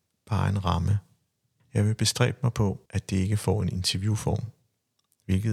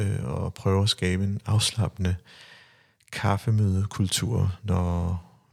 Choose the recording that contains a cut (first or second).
first